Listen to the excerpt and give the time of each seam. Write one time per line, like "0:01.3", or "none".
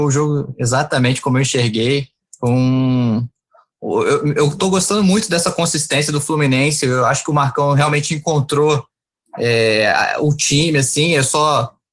none

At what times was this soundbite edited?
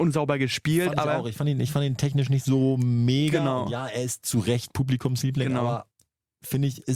none

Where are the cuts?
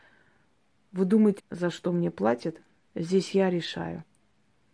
0:01.4
0:02.9

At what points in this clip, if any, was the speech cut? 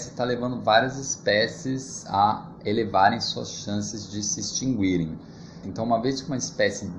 0:05.6

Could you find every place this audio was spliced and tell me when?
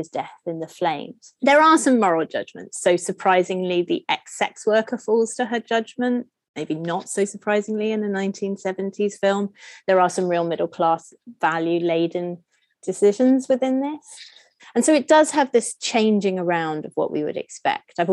0:01.4
0:14.6

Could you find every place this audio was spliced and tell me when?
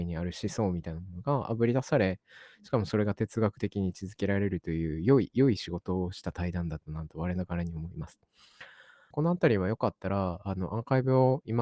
0:09.1

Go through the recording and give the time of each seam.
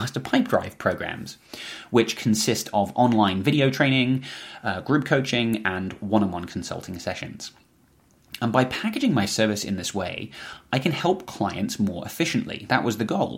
none

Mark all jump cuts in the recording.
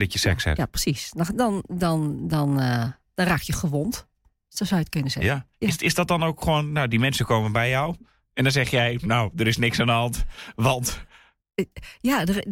none

